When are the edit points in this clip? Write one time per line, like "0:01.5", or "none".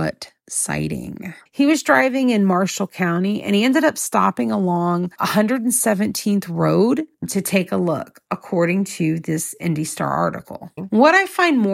0:01.5
0:10.8